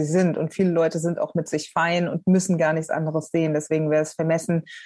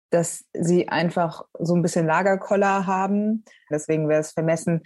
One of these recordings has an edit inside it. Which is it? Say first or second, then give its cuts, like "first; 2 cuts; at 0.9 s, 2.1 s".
second; 1 cut; at 3.7 s